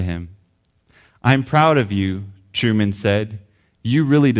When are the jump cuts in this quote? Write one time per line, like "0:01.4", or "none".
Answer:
none